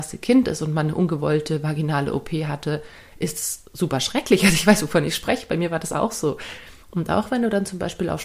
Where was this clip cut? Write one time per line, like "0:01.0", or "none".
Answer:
0:06.8